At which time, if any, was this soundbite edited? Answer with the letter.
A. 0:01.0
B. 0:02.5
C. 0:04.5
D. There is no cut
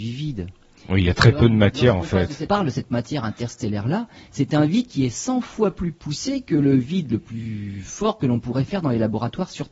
B